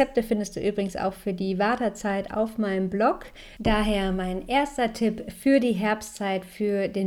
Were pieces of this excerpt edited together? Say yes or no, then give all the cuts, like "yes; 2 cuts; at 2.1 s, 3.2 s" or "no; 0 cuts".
yes; 1 cut; at 3.6 s